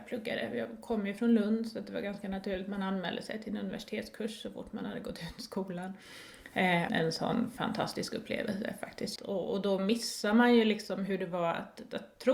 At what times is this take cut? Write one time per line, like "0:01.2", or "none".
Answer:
0:06.9
0:09.2